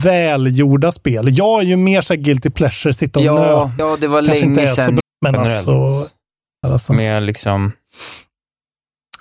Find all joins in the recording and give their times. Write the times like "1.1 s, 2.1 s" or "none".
3.8 s, 5.0 s, 6.6 s